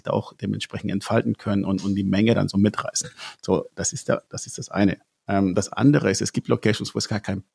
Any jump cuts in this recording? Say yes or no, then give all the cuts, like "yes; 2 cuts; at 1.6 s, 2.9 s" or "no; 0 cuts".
no; 0 cuts